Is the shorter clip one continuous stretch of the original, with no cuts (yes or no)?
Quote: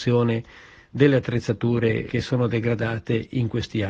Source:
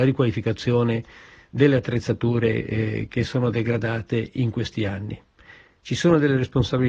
no